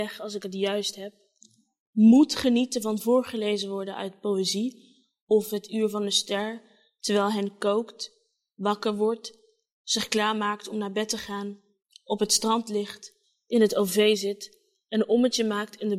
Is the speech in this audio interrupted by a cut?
no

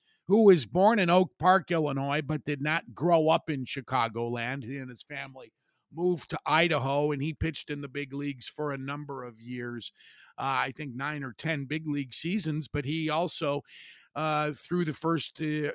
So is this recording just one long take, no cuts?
yes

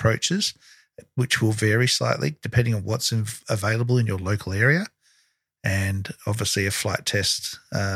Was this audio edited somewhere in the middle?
no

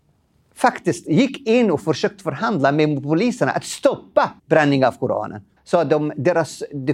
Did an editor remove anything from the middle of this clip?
yes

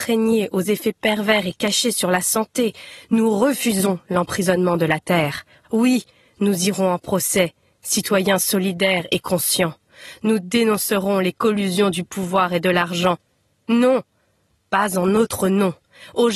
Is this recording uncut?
yes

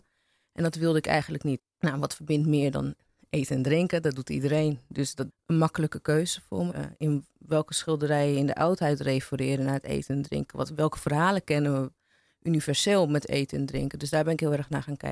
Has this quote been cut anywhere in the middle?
yes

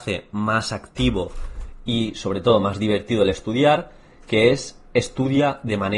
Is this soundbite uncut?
yes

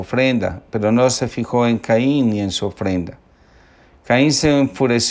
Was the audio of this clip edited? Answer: no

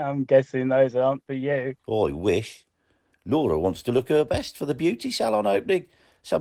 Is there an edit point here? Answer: yes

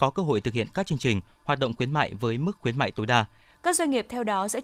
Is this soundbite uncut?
no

